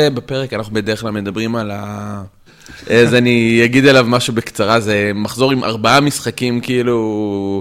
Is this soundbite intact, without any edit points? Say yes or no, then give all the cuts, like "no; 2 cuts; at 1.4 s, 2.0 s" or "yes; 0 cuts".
no; 1 cut; at 2.5 s